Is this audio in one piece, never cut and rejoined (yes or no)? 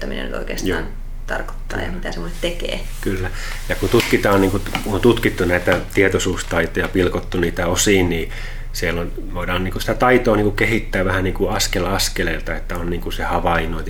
yes